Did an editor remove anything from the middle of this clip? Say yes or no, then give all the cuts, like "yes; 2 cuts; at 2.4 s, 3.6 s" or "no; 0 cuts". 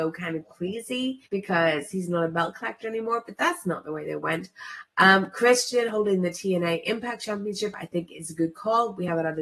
yes; 1 cut; at 1.3 s